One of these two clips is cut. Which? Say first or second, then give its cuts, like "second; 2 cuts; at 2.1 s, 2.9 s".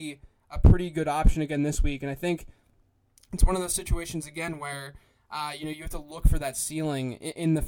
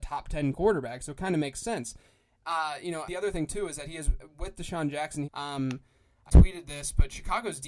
second; 3 cuts; at 3.1 s, 5.2 s, 6.3 s